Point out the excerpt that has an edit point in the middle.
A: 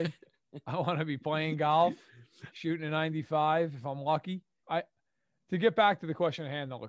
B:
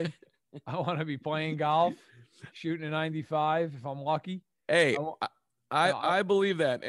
A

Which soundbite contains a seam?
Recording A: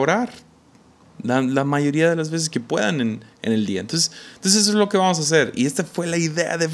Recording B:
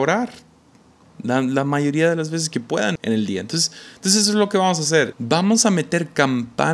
B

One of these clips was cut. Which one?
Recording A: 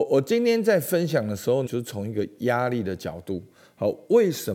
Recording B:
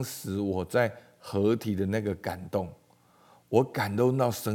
A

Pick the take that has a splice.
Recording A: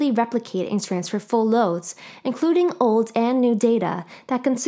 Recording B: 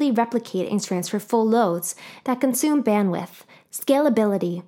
B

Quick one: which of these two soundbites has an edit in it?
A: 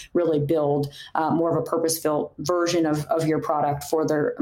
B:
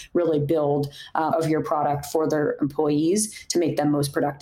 B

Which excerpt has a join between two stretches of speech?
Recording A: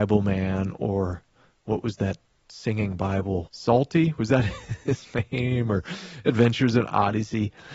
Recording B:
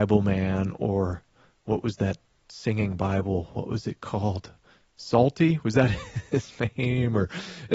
A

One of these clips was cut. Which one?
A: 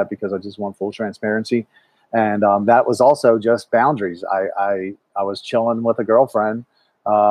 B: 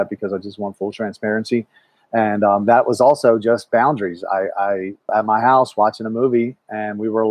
B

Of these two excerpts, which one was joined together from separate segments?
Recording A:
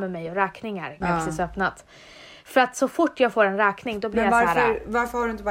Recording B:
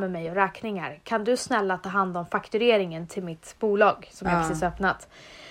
A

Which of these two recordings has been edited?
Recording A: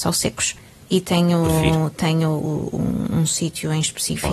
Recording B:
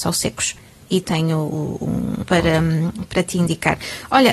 B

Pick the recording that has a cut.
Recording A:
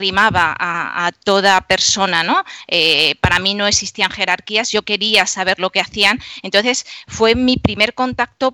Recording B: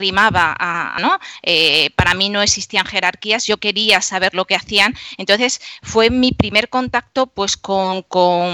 B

